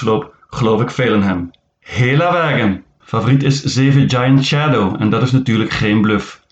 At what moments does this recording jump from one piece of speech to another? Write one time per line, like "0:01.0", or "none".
0:03.0